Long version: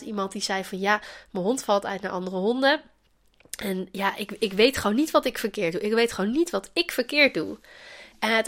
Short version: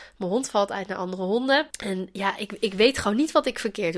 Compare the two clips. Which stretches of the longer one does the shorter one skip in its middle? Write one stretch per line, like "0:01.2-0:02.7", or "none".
0:02.8-0:03.5